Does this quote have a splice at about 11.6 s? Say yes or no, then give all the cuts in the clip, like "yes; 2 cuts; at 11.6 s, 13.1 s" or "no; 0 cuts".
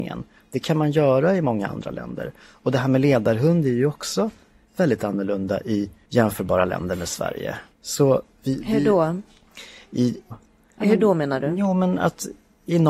no; 2 cuts; at 7.7 s, 10.3 s